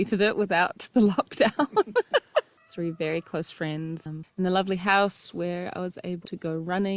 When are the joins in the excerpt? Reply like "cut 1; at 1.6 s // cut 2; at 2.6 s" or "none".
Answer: cut 1; at 2.6 s // cut 2; at 4.2 s